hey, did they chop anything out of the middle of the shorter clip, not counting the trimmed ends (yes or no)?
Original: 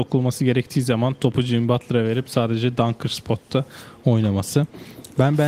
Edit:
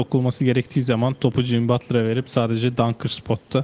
no